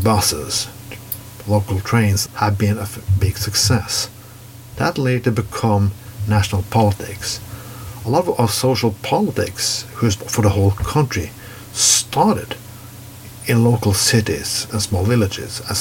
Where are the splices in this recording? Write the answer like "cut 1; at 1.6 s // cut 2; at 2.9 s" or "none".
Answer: cut 1; at 2.3 s // cut 2; at 10.2 s